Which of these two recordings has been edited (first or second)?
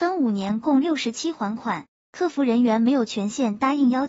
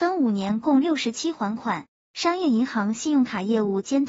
second